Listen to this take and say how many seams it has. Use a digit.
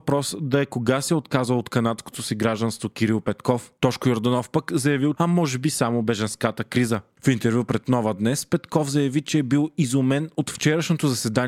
2